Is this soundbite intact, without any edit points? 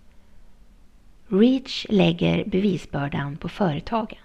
yes; 0 cuts

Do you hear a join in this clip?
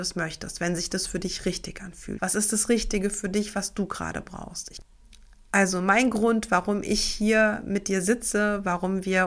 yes; 1 cut; at 2.2 s

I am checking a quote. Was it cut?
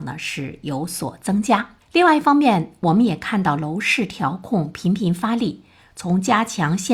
no; 0 cuts

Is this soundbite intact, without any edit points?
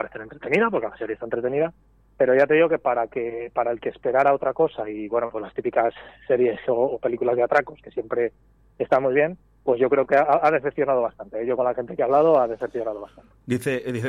yes; 0 cuts

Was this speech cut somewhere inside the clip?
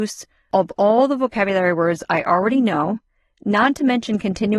no; 0 cuts

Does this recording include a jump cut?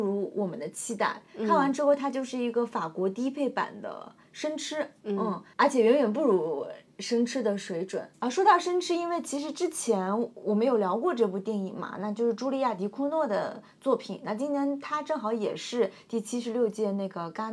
no; 0 cuts

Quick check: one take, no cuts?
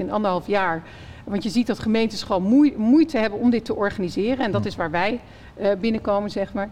yes; 0 cuts

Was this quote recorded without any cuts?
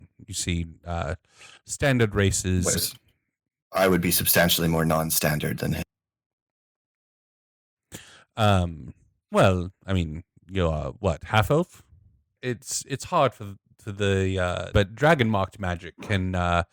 no; 2 cuts; at 12.4 s, 14.7 s

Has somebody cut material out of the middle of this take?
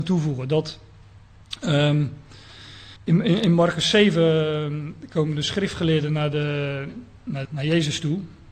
yes; 2 cuts; at 3.0 s, 7.4 s

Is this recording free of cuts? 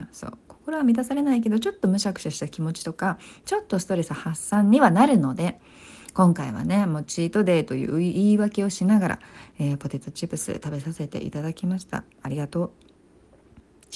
yes; 0 cuts

